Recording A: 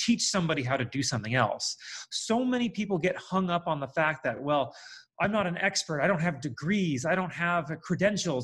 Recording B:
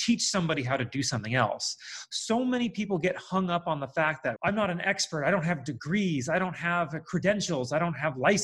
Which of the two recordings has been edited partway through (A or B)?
B